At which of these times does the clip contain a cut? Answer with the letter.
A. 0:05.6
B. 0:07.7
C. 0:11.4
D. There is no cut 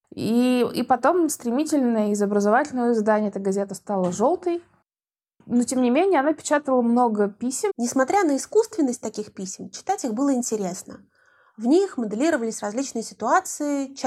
B